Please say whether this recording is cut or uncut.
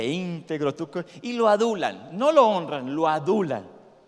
uncut